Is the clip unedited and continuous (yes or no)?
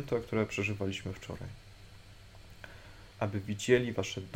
no